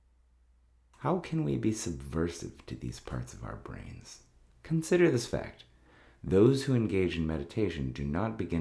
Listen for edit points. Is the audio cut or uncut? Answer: cut